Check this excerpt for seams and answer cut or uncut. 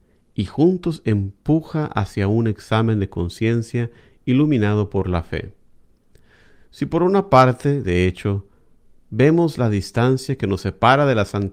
uncut